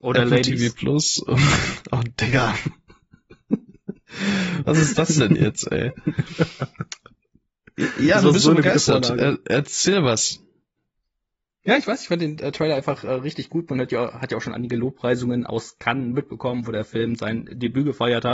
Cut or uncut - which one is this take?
uncut